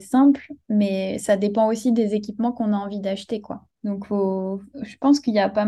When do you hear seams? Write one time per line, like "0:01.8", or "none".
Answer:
0:03.7